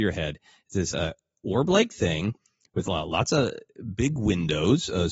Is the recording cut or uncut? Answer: uncut